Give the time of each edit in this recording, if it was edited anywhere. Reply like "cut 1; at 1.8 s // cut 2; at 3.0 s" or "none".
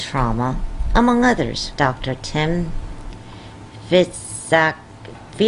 cut 1; at 1.7 s